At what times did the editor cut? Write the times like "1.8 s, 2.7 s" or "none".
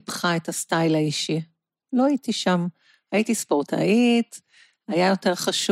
none